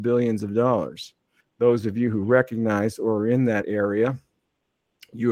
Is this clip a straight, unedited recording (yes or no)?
no